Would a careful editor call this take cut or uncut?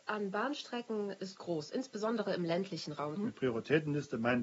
cut